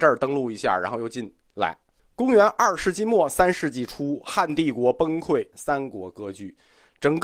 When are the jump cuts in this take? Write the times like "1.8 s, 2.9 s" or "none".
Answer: 2.0 s, 5.5 s